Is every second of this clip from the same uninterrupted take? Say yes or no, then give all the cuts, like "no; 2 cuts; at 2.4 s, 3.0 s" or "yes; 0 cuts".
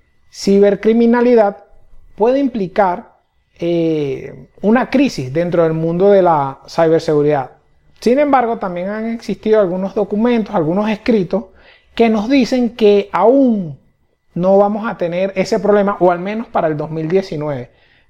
yes; 0 cuts